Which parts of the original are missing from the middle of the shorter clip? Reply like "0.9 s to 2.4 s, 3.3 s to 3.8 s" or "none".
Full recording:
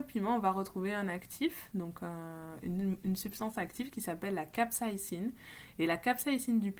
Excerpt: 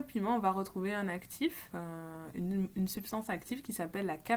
1.7 s to 2.0 s